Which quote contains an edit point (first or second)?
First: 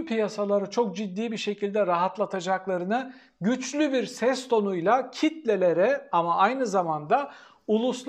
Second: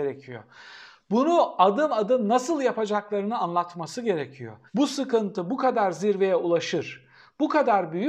second